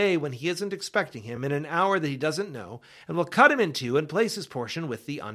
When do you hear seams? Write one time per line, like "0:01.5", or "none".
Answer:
none